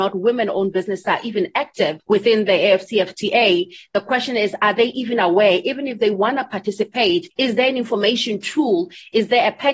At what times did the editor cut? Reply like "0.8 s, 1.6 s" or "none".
none